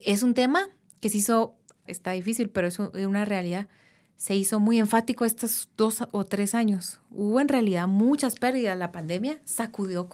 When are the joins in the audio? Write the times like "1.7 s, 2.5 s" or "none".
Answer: 1.9 s